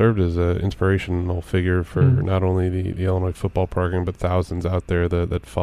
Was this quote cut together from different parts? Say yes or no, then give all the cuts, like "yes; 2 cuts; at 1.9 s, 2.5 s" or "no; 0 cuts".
no; 0 cuts